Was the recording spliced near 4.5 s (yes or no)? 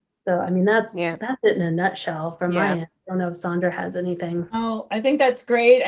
no